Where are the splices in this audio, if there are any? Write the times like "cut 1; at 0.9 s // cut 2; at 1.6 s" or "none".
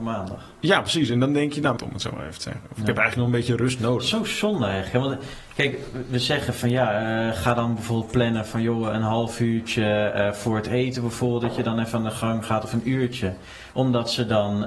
cut 1; at 1.8 s // cut 2; at 13.7 s

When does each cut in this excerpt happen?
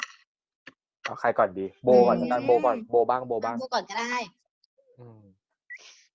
none

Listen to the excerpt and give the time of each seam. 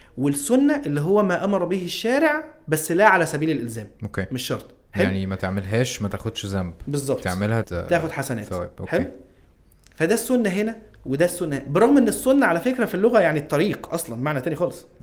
cut 1; at 7.6 s

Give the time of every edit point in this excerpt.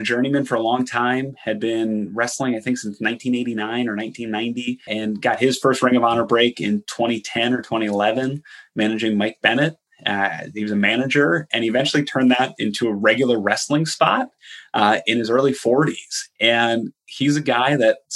cut 1; at 4.9 s

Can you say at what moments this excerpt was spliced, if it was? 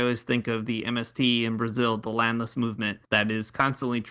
cut 1; at 3.0 s

